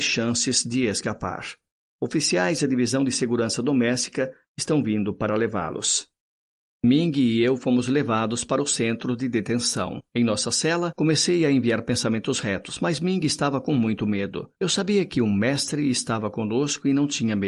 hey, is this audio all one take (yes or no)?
yes